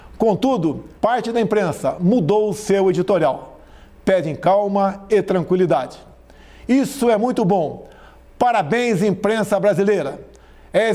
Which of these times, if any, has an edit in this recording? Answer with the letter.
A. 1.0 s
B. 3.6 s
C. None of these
A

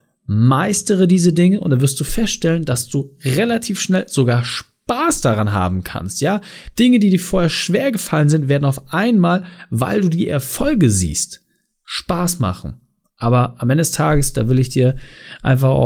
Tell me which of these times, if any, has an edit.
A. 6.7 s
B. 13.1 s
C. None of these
C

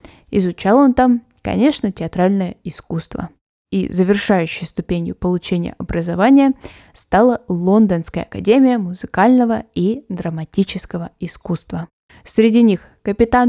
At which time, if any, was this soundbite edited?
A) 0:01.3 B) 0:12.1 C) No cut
B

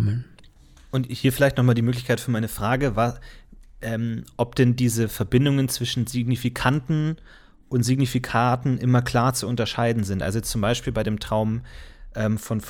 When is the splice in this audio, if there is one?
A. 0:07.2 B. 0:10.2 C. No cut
C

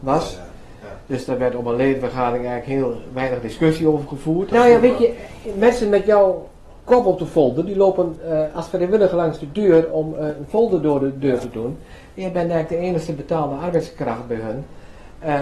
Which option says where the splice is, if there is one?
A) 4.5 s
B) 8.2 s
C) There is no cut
A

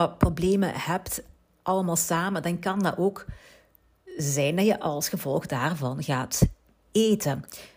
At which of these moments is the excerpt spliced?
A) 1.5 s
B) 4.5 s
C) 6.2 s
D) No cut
D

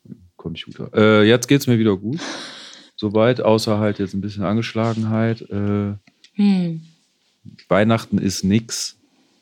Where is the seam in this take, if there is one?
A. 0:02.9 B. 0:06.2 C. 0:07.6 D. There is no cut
B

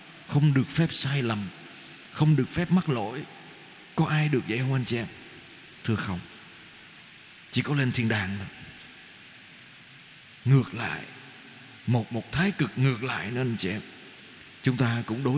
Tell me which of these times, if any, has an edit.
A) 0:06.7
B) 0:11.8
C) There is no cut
C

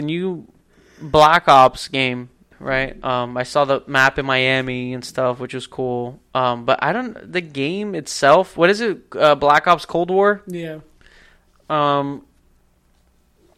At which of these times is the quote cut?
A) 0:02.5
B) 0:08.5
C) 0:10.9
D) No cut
A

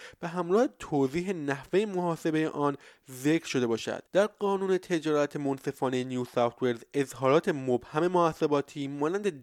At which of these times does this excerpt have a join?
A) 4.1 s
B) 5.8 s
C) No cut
A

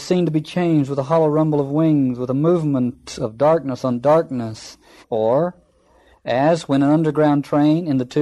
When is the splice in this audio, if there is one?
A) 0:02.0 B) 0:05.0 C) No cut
B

